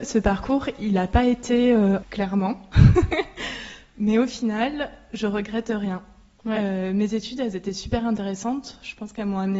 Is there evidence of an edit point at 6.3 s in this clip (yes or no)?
no